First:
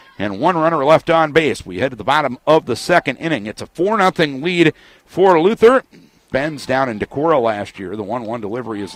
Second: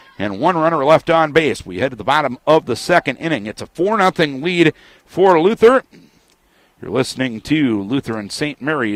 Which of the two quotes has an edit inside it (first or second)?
first